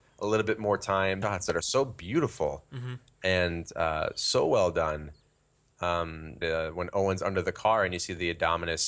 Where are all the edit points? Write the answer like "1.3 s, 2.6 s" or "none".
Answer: 1.2 s, 6.4 s